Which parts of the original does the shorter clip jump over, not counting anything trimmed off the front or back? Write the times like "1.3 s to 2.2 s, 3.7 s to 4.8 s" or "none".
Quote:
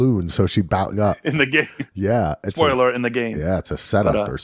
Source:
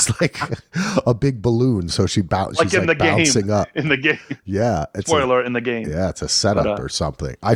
2.5 s to 3.4 s